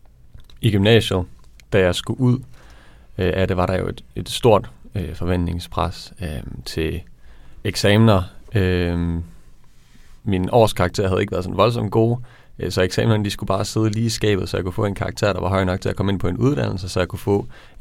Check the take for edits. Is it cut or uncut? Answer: uncut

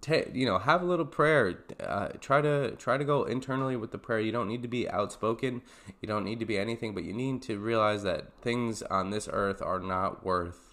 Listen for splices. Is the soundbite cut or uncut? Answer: uncut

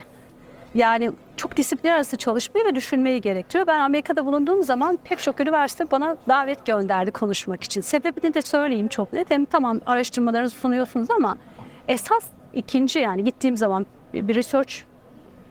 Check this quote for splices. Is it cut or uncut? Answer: uncut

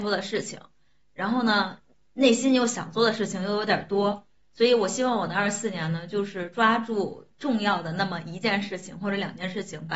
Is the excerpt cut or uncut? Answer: uncut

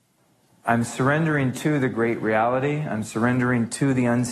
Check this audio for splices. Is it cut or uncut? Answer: uncut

